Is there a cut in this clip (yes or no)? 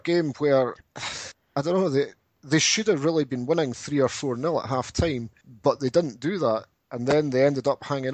no